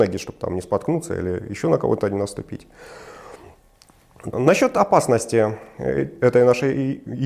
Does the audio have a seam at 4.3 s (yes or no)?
yes